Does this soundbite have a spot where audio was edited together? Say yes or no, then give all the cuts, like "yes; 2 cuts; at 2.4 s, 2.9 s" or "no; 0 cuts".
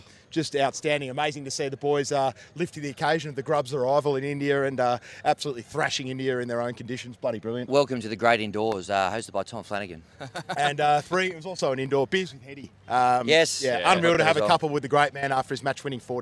no; 0 cuts